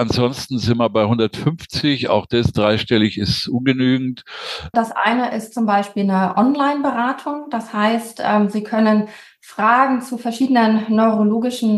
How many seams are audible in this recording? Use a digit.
1